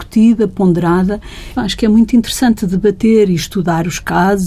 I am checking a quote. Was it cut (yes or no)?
yes